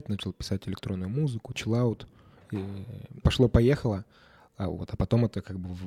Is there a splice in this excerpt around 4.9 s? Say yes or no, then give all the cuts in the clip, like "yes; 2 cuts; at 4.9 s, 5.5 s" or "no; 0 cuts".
no; 2 cuts; at 1.5 s, 3.2 s